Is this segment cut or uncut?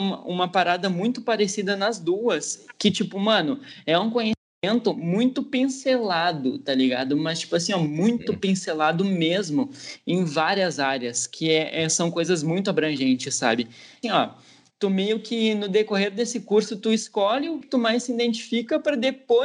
cut